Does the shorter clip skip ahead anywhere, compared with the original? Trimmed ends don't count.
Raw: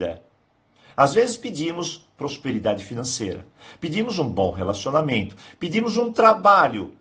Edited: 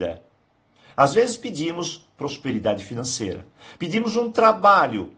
yes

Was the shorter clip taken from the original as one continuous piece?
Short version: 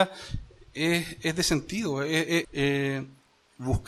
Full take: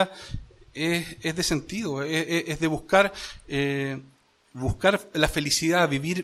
no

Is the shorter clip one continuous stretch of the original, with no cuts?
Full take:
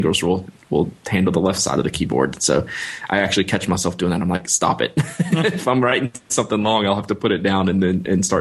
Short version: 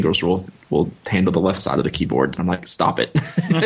no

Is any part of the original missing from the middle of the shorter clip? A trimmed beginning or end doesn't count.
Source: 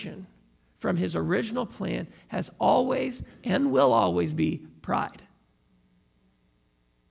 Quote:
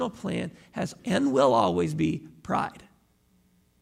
yes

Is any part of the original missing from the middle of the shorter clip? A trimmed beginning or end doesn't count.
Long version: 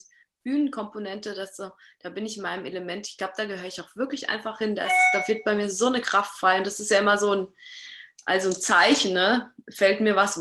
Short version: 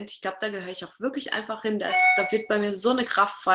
no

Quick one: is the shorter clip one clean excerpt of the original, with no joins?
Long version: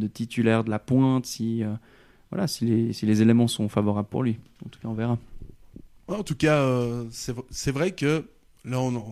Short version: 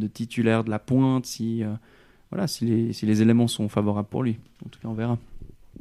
yes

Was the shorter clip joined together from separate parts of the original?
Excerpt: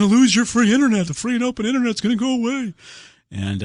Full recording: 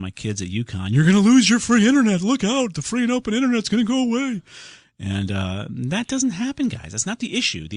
yes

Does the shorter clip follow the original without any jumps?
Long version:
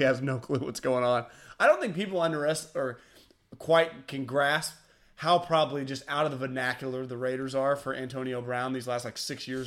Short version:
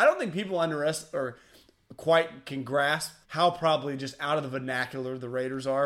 no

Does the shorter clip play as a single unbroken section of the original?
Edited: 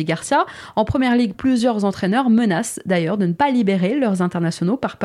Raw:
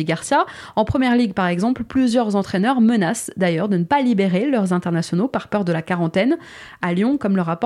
no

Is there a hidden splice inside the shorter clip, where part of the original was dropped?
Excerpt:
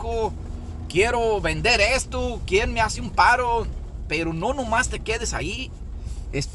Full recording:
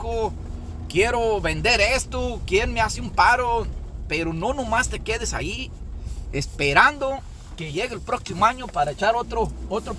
no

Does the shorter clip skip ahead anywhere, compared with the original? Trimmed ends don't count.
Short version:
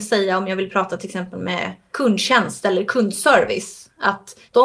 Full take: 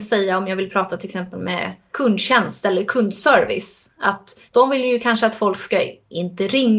no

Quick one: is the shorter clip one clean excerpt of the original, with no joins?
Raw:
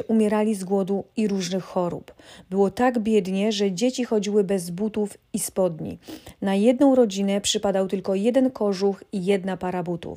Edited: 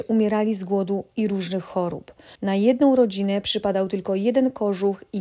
no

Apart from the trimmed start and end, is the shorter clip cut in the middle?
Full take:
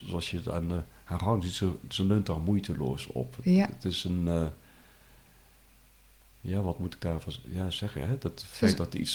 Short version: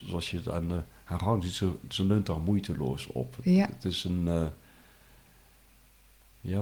no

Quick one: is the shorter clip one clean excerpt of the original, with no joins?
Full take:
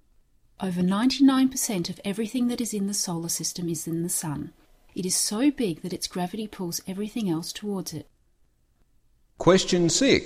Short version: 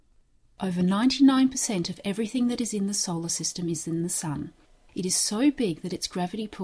yes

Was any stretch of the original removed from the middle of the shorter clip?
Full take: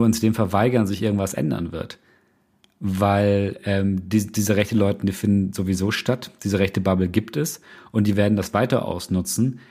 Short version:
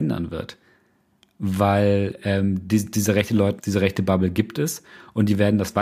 yes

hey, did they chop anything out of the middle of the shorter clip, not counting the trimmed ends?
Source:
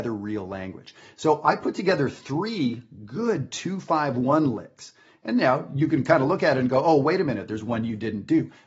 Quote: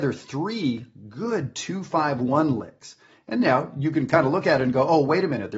no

